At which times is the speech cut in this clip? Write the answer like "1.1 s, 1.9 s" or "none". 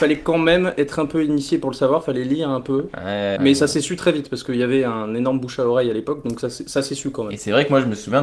3.4 s